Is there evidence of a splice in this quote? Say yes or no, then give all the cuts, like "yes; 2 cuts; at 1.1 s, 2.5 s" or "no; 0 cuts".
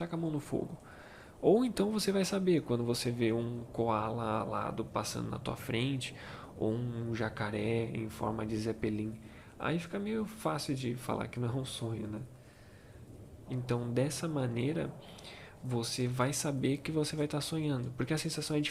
yes; 1 cut; at 13.4 s